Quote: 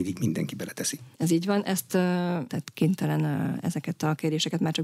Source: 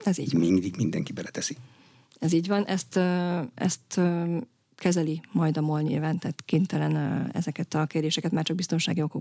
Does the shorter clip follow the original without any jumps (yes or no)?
no